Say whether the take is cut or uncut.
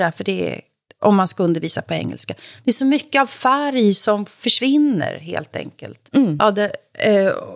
uncut